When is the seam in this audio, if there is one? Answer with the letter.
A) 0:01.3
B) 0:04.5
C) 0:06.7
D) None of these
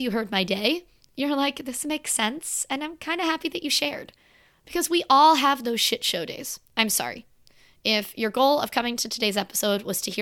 C